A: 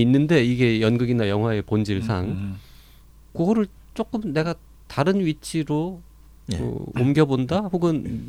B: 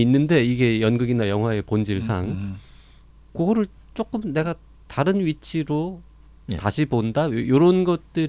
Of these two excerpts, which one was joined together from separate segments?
B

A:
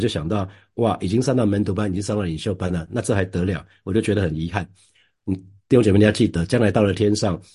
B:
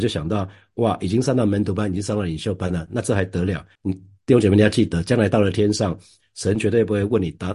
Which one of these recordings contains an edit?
B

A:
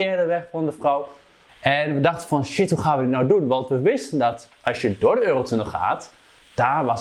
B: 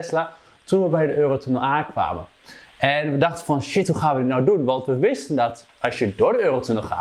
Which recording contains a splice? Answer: A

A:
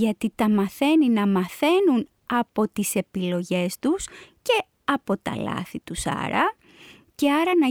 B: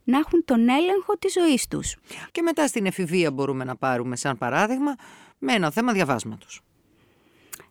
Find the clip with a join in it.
B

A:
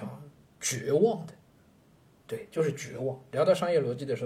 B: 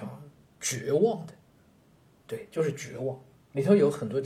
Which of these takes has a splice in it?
A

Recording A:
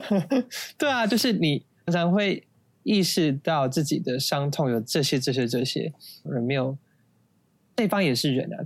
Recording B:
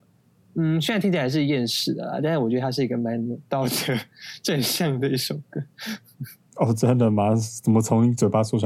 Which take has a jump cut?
A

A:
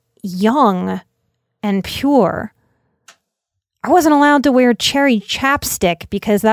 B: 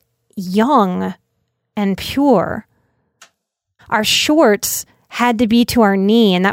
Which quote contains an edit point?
B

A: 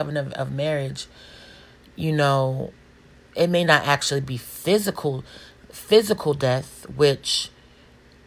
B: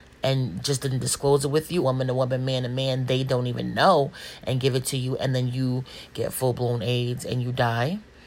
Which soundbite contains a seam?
B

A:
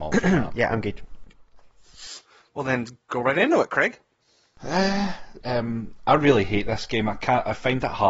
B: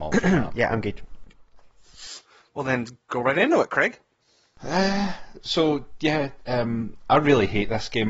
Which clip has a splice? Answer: A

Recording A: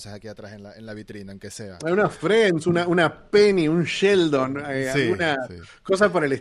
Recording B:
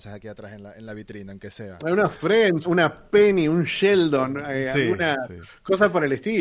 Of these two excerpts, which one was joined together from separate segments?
B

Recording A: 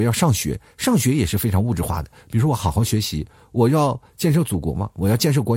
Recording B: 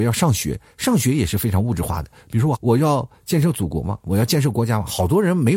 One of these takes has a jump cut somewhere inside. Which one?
B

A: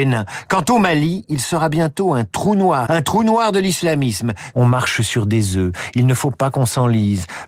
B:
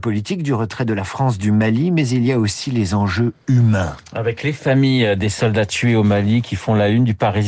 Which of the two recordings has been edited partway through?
A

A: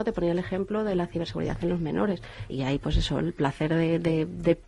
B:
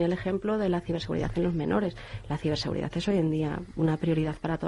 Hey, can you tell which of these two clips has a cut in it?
A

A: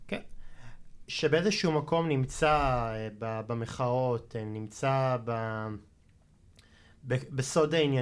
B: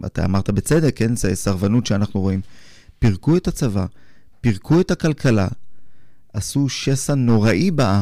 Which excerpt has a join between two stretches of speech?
A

